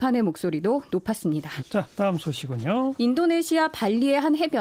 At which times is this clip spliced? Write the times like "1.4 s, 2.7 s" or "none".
1.6 s